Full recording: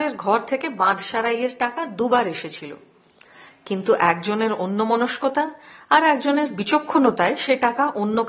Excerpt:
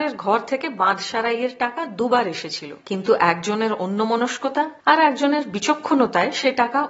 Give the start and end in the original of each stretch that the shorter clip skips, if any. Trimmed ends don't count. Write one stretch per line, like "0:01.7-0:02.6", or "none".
0:02.8-0:03.6
0:05.6-0:05.8